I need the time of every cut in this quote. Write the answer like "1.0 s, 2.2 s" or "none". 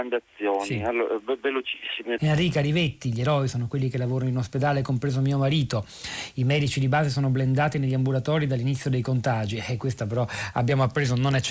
2.2 s